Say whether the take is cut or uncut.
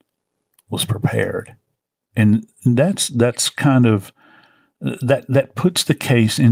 uncut